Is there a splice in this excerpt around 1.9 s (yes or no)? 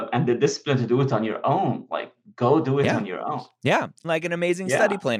no